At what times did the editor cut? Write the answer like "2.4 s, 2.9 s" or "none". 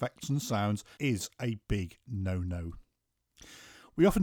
1.0 s

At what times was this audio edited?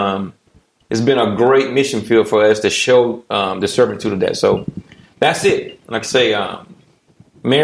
none

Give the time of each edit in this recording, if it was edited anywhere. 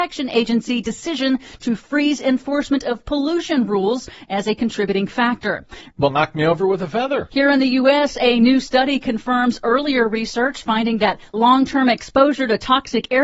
5.9 s

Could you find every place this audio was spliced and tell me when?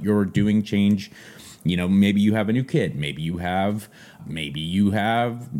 4.2 s

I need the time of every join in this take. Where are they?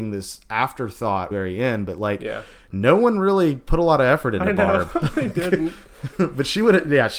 1.3 s

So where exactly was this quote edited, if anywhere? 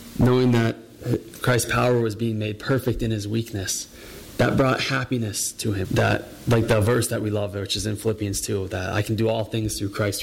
5.8 s

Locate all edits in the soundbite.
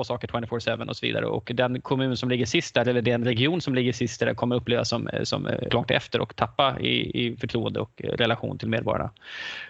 5.7 s

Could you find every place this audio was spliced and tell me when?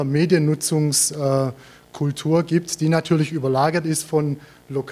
none

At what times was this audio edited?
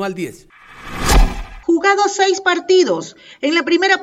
1.6 s

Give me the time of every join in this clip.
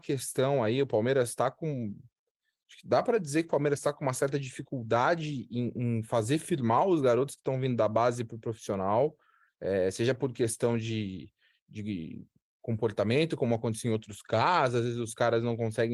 none

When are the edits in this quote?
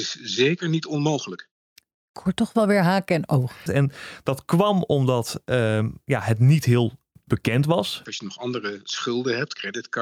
3.7 s, 8.1 s

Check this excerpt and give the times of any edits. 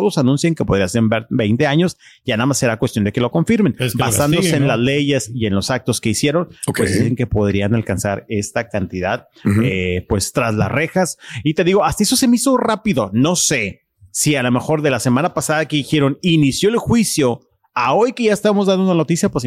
none

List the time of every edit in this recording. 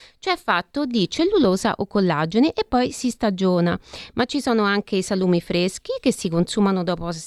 none

